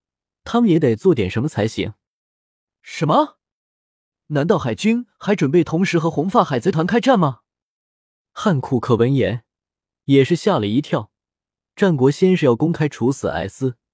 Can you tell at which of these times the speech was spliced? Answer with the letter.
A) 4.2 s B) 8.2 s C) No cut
C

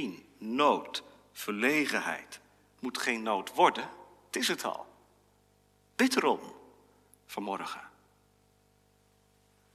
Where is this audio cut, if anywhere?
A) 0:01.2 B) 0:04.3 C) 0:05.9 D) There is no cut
D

